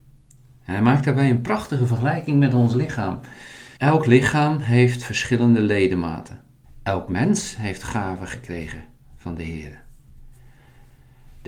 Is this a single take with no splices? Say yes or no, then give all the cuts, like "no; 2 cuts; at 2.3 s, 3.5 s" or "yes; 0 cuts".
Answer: no; 2 cuts; at 3.8 s, 6.6 s